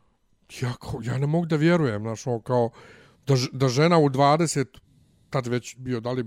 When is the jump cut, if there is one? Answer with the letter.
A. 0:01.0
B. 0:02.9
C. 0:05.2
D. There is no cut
D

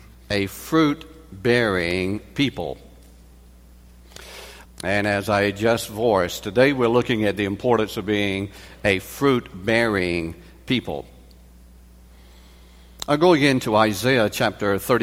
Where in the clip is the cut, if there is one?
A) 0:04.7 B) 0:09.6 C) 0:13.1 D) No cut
A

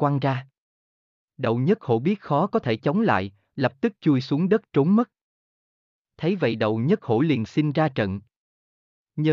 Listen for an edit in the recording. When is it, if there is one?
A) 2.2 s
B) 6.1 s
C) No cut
B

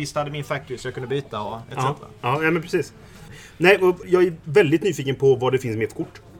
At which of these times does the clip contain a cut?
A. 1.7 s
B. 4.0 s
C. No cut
B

